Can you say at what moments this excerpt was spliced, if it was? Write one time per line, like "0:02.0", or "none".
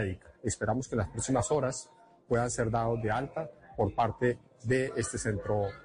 none